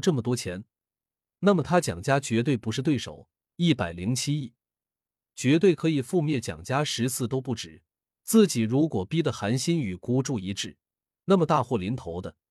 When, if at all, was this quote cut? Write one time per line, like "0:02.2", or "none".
0:05.3